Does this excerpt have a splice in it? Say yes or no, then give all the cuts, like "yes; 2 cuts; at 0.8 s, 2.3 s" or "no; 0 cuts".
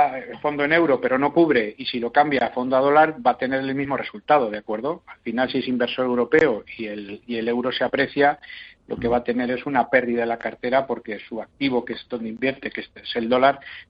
no; 0 cuts